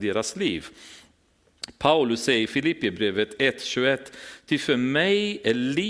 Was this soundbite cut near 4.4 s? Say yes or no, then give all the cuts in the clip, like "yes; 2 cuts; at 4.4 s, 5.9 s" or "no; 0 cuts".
no; 0 cuts